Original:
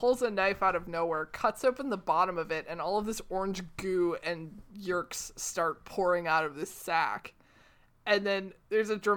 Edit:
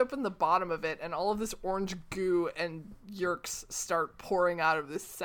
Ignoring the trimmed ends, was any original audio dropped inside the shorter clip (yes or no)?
no